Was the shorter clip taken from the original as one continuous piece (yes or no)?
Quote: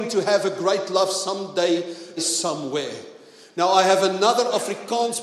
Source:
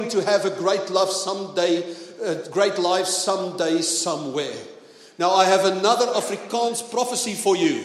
no